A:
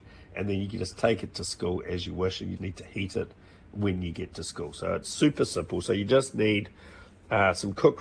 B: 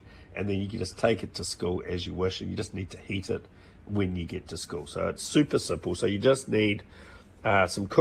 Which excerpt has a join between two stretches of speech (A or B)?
A